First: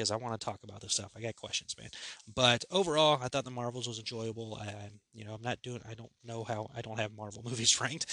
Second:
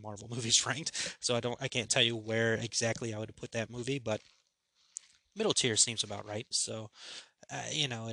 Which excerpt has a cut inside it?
second; 1 cut; at 6.5 s

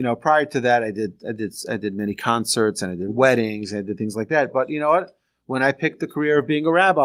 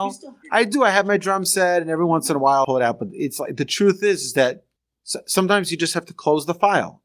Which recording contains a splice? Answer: second; 1 cut; at 2.6 s

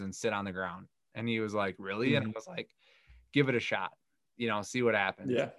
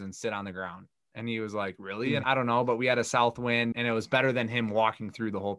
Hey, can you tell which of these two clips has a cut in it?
second; 2 cuts; at 2.2 s, 3.7 s

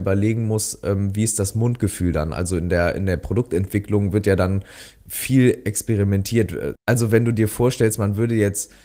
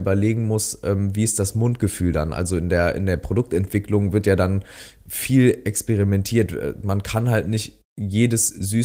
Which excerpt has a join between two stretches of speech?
first; 1 cut; at 6.8 s

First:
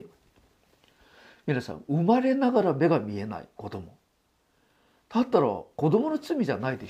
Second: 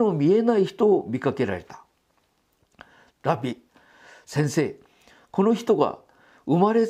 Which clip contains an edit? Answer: second; 1 cut; at 3.1 s

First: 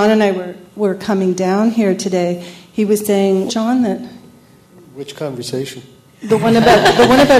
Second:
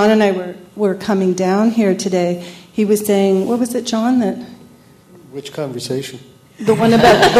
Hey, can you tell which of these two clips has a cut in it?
first; 1 cut; at 3.5 s

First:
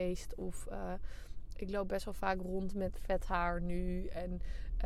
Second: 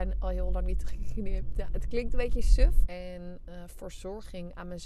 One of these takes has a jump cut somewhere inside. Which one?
second; 1 cut; at 2.9 s

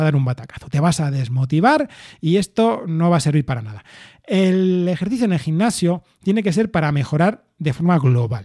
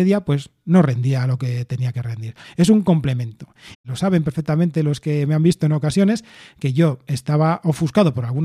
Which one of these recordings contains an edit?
second; 2 cuts; at 2.4 s, 3.7 s

